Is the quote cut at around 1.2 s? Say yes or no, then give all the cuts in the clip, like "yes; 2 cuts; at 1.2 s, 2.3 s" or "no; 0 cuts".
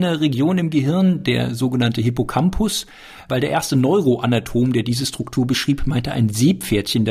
no; 0 cuts